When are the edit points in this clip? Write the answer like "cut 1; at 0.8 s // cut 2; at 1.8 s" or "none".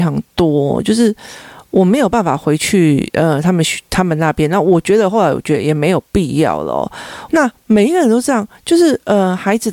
cut 1; at 7.3 s